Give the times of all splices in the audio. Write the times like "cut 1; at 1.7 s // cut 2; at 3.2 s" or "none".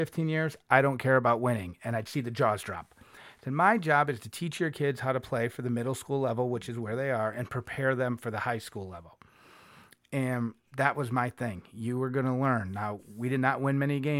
none